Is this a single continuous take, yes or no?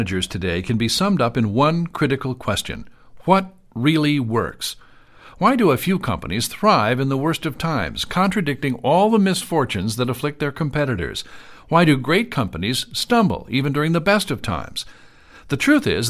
yes